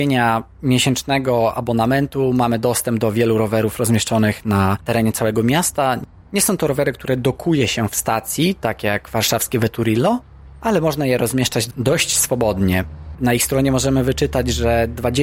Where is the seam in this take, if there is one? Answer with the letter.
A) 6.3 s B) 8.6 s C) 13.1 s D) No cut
C